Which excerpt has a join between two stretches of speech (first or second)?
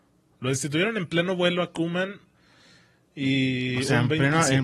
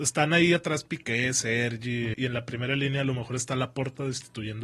second